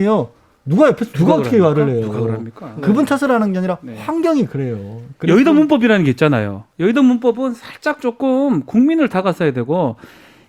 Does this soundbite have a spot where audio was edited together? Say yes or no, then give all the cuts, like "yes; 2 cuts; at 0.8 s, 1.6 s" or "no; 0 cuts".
no; 0 cuts